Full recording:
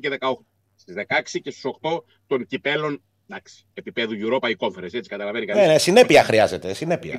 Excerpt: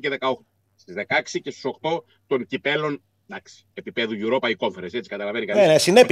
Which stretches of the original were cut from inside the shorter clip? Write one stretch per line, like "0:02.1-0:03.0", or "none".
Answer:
none